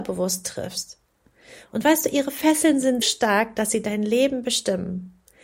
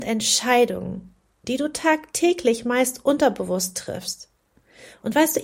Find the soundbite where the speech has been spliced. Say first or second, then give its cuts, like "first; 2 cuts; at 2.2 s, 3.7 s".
first; 1 cut; at 3.0 s